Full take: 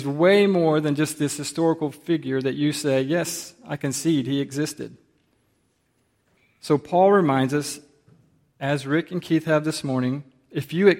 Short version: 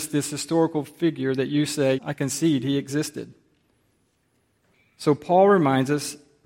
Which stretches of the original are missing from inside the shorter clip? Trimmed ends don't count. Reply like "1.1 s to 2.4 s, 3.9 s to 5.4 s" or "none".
3.0 s to 3.6 s